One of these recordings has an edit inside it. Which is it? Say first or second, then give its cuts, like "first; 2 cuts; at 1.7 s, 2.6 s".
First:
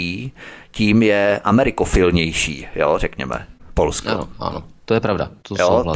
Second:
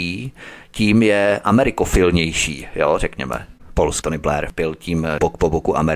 second; 1 cut; at 4.0 s